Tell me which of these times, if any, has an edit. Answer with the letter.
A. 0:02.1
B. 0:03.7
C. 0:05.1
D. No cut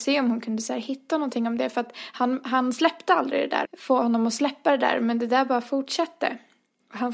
B